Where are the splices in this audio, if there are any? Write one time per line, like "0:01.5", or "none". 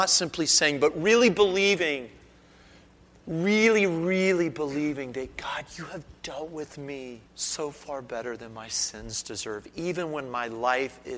0:07.3

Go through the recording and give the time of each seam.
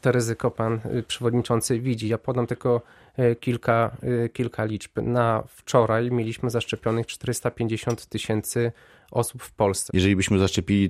0:09.9

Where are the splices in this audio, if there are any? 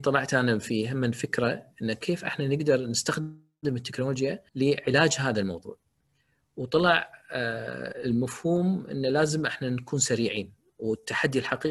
0:04.5

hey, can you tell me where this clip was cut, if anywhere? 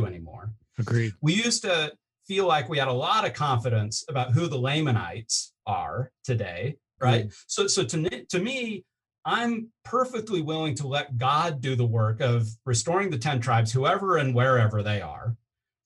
0:07.0

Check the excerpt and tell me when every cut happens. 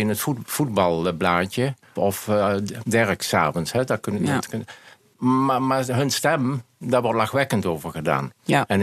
0:02.0

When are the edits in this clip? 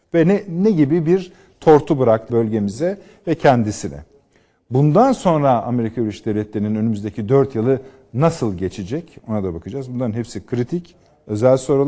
0:02.3

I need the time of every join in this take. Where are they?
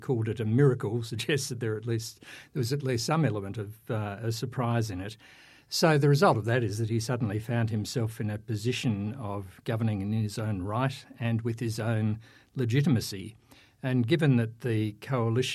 none

